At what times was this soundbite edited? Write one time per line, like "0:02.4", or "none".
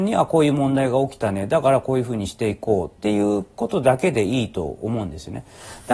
none